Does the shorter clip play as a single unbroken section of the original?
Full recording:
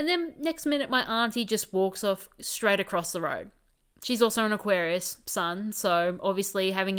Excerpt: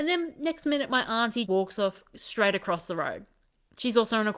no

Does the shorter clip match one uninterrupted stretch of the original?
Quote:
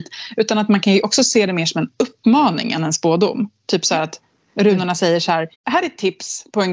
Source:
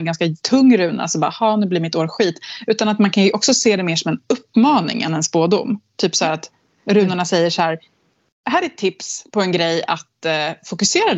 no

